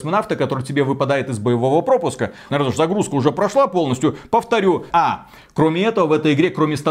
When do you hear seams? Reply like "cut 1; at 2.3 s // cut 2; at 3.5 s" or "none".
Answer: cut 1; at 2.5 s // cut 2; at 4.9 s